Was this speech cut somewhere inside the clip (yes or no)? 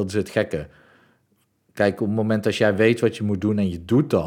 no